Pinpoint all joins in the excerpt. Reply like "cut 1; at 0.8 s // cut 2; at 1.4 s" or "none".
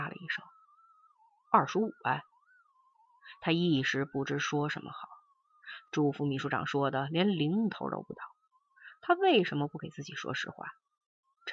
cut 1; at 5.8 s